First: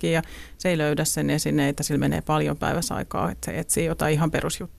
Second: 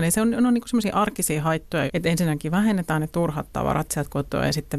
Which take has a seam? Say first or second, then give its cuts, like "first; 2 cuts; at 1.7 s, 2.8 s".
second; 1 cut; at 1.9 s